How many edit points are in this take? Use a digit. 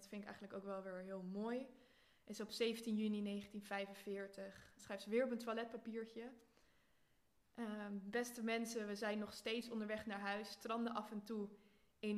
1